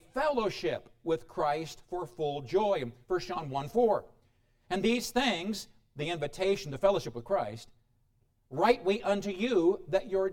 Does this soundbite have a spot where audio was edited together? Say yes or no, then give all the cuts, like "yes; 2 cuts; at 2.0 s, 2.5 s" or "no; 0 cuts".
no; 0 cuts